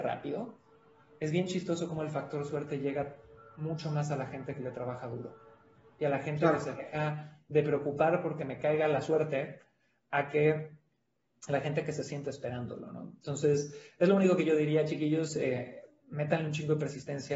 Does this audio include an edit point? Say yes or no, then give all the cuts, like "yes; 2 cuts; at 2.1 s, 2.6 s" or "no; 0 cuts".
yes; 1 cut; at 1.2 s